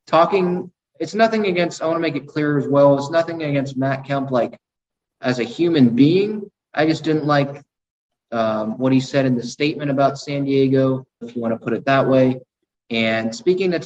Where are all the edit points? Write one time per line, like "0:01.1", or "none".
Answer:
0:11.2